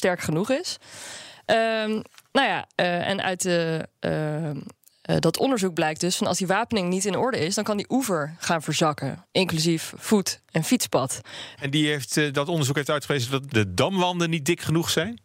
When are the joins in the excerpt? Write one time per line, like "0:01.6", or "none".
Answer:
0:11.6
0:13.5